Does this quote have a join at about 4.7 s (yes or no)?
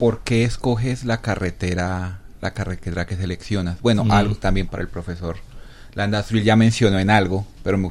yes